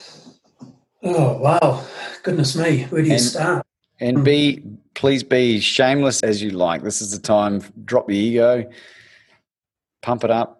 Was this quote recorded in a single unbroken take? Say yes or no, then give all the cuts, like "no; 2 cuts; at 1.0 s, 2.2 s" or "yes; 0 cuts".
no; 1 cut; at 6.2 s